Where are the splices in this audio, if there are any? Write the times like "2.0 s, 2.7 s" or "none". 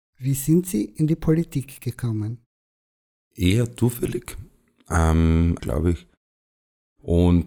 5.6 s